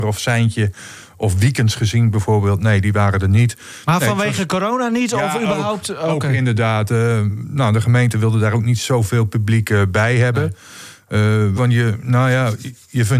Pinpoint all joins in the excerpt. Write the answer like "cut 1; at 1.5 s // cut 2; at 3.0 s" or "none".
cut 1; at 11.6 s